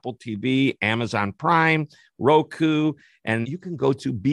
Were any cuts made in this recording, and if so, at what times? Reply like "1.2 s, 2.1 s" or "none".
3.4 s